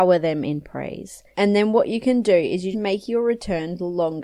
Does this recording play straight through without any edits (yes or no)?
no